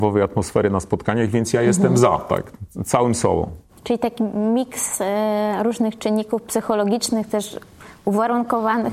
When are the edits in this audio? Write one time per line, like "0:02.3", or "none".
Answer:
none